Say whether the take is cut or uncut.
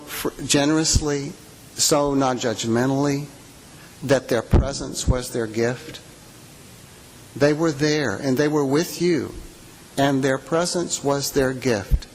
uncut